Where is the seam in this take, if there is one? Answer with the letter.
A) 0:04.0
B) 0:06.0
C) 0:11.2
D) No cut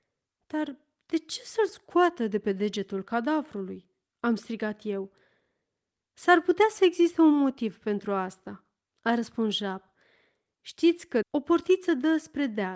C